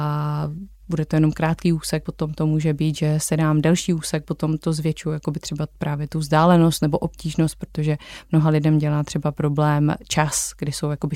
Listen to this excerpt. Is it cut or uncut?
uncut